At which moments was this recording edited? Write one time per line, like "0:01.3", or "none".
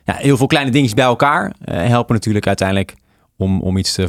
none